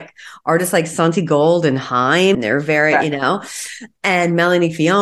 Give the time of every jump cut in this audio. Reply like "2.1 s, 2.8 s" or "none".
2.3 s